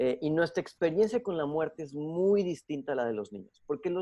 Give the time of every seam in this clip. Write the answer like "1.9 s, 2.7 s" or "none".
none